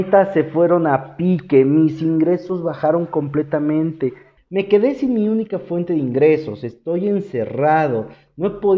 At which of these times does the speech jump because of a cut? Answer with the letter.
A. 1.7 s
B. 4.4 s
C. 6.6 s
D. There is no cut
B